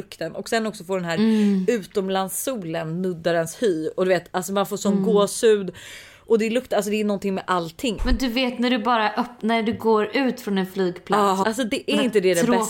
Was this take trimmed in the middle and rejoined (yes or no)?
yes